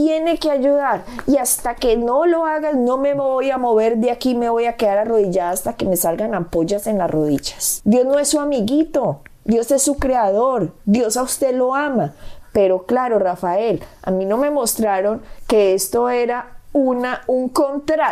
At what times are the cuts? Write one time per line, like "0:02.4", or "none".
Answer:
0:07.8

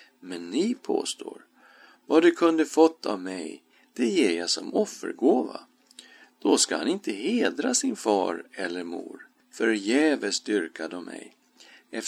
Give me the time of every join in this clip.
0:02.0
0:09.4

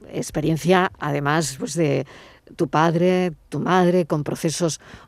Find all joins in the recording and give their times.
0:01.6

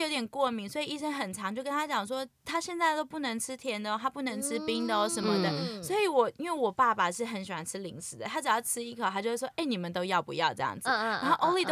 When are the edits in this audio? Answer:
none

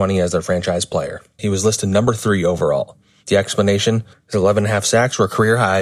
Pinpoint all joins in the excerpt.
0:01.4
0:04.1

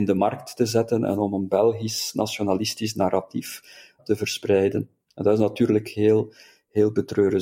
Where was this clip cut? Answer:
0:04.0

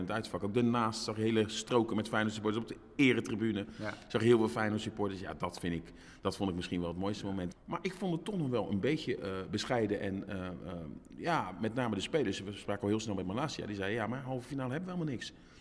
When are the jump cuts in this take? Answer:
0:07.5

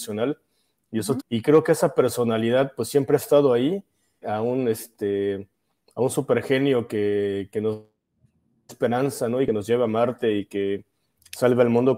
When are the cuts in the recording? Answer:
0:01.2
0:04.2

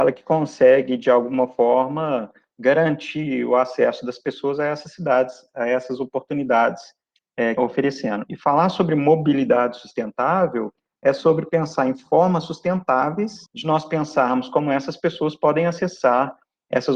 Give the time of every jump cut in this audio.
0:07.6
0:13.5

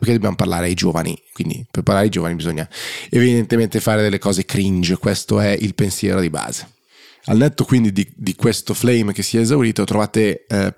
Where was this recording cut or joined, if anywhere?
none

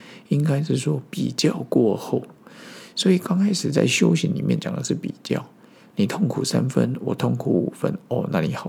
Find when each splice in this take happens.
none

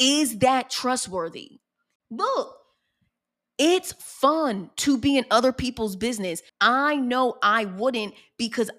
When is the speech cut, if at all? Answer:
0:02.0
0:06.5

